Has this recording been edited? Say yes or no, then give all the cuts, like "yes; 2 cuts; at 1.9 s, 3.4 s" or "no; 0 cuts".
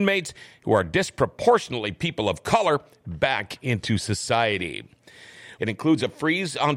yes; 1 cut; at 5.6 s